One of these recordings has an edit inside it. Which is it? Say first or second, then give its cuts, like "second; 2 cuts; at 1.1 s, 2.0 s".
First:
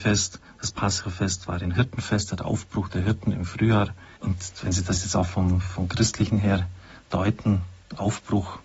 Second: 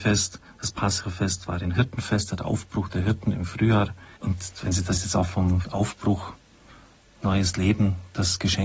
second; 1 cut; at 5.6 s